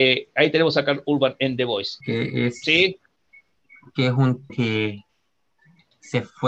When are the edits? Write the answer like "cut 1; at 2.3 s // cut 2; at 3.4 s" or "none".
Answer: cut 1; at 2.0 s // cut 2; at 4.5 s